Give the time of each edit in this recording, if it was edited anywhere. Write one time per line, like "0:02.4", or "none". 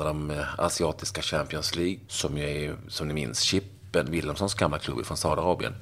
0:02.1